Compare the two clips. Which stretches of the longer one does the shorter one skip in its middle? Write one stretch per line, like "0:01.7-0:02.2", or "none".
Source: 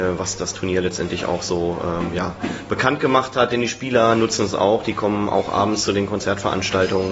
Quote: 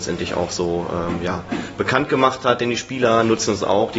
none

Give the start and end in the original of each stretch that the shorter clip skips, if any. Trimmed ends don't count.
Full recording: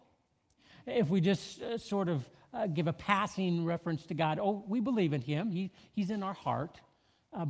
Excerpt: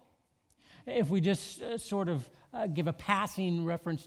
none

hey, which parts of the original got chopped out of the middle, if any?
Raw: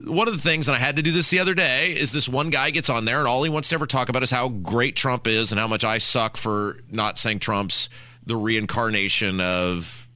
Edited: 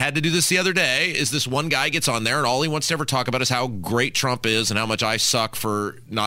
none

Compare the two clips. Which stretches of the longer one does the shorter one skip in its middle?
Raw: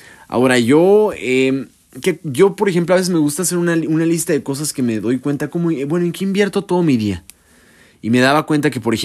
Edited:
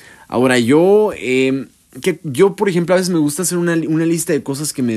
none

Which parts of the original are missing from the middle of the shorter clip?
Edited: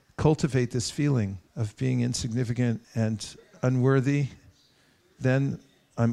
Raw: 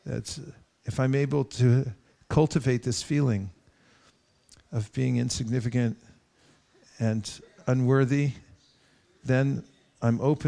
0:03.6-0:04.6
0:06.0-0:06.9

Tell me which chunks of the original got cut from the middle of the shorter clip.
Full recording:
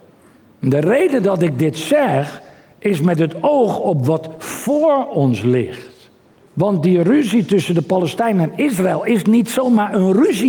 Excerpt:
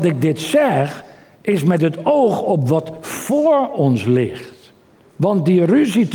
none

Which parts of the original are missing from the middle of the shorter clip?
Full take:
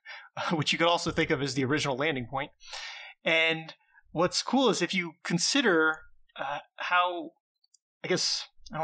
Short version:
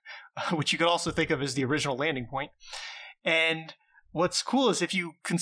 none

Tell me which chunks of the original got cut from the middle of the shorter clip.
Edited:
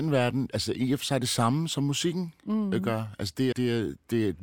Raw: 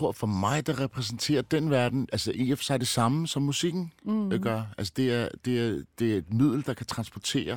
0:05.1-0:05.4

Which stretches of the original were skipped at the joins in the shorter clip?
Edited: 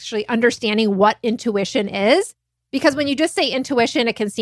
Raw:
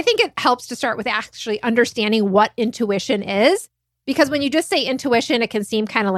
none

